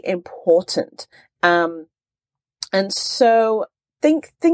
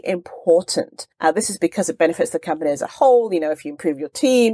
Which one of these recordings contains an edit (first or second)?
second